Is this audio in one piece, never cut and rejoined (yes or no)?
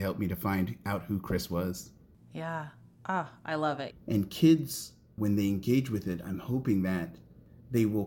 no